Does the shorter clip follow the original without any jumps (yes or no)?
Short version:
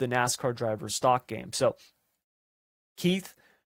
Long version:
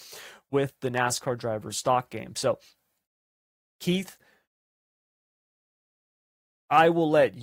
yes